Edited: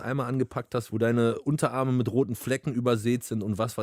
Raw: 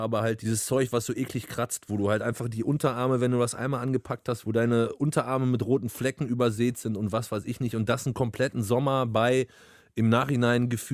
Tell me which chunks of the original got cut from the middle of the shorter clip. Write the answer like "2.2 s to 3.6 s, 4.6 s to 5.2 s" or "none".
none